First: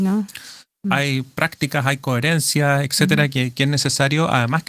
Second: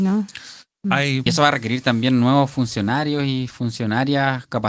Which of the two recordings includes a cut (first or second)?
second